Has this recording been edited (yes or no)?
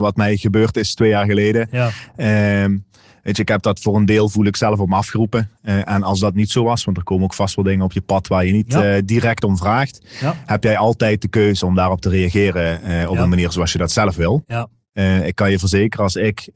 no